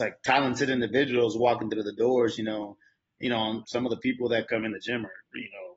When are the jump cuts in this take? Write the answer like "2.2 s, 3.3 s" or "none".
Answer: 3.6 s